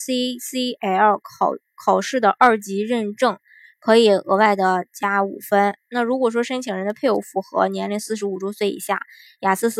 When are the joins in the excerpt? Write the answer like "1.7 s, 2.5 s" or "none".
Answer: 5.9 s